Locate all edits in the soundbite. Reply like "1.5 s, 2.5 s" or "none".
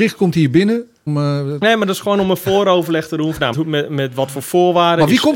1.1 s, 3.5 s